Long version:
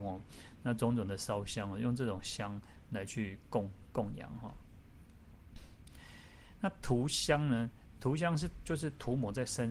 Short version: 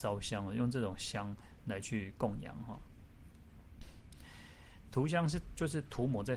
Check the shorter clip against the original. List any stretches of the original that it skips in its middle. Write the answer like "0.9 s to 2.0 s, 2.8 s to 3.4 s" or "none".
3.4 s to 3.9 s, 6.6 s to 7.9 s